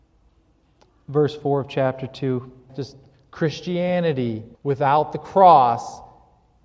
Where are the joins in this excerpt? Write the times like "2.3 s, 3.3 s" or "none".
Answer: 2.7 s, 4.5 s